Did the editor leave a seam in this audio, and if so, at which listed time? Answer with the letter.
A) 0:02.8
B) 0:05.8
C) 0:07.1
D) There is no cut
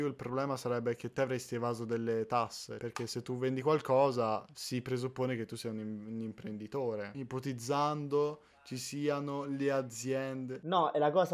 C